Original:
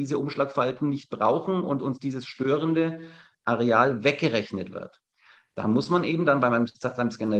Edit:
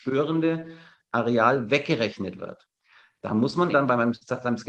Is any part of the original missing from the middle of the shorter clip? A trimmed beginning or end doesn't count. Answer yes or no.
yes